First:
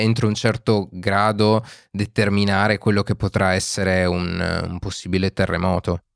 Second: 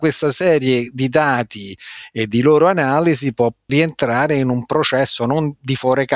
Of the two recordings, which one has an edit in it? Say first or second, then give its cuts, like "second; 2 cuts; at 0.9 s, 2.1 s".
second; 1 cut; at 3.7 s